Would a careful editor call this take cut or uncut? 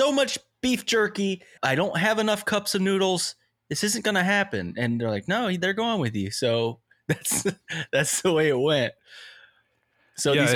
cut